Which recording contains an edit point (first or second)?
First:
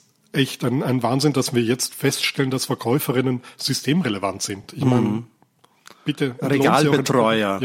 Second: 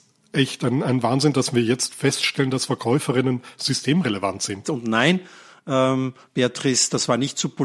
second